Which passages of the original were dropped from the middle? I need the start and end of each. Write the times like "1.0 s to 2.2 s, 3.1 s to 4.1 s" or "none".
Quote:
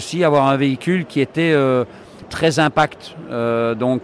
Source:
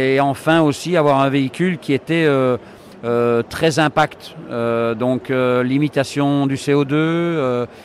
3.0 s to 3.4 s